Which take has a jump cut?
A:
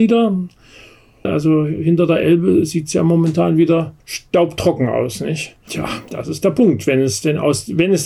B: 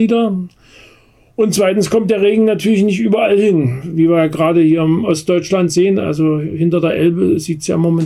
A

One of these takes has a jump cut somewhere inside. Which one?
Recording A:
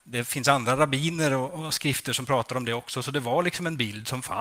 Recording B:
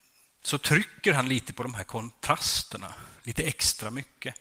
A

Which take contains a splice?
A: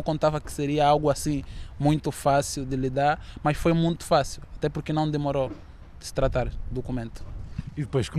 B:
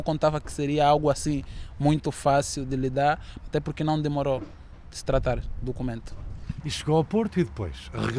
B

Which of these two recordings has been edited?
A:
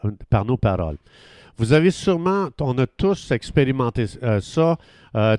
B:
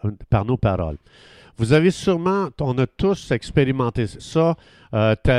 B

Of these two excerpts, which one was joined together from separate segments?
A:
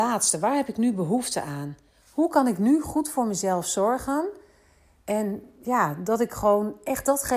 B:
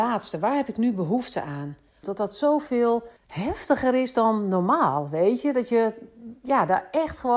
B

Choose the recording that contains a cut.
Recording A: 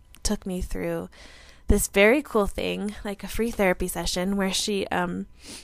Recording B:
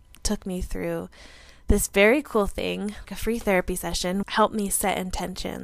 B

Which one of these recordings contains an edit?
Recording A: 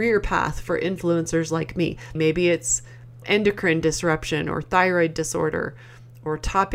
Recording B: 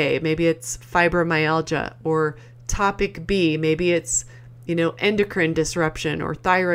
A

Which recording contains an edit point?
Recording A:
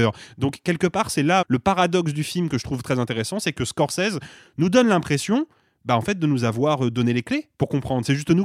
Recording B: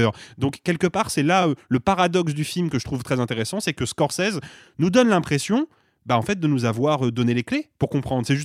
A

